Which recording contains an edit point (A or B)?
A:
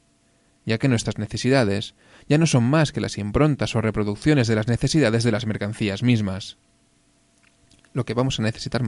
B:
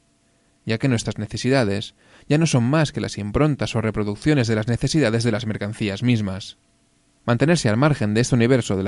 B